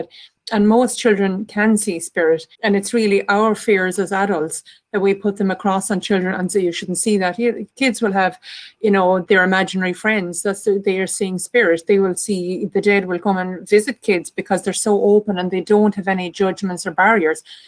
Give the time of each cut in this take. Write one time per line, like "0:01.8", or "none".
0:02.5